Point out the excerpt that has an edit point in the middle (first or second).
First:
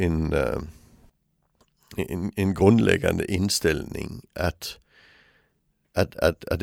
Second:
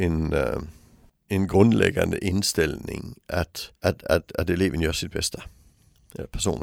second